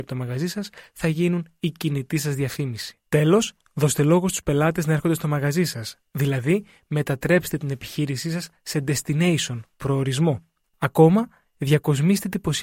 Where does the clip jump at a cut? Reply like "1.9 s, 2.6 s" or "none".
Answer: 10.7 s